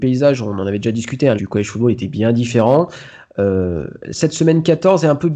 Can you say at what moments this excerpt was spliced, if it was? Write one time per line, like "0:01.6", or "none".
0:01.4